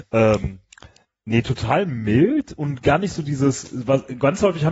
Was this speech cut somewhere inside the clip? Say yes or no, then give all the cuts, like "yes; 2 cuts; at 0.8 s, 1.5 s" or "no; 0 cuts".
no; 0 cuts